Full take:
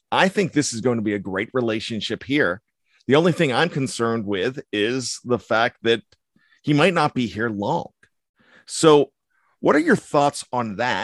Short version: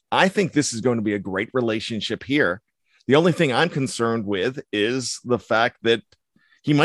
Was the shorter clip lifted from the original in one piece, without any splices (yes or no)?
yes